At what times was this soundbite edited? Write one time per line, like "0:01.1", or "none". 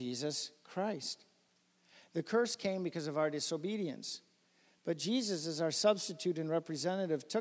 none